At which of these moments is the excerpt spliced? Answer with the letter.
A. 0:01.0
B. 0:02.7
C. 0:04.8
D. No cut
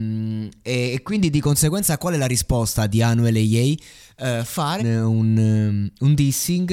C